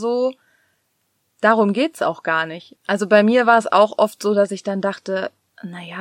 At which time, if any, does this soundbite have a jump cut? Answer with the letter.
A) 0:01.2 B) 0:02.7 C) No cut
B